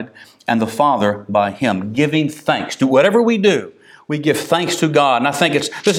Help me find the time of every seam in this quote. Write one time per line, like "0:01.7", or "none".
none